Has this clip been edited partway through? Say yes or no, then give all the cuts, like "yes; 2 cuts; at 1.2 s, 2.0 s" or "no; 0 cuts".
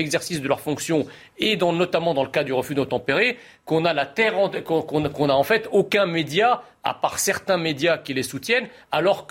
no; 0 cuts